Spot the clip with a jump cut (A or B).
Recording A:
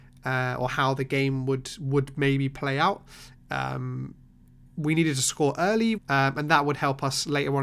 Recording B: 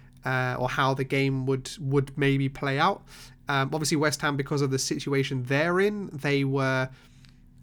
A